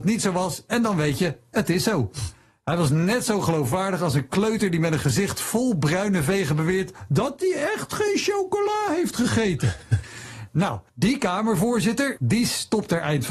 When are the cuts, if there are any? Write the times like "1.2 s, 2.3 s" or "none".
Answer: 10.9 s, 12.2 s

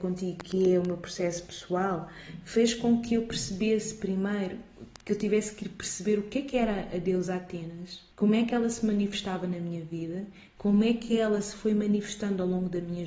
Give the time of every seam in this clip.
8.1 s

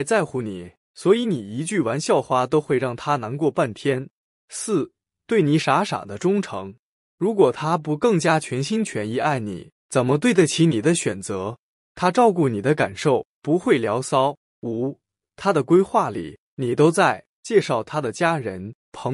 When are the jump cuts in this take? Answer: 7.0 s, 14.5 s, 17.3 s

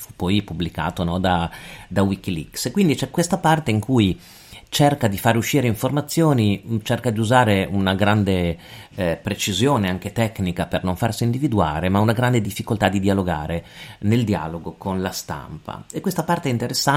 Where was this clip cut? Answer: none

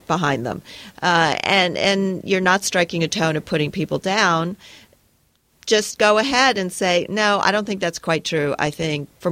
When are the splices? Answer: none

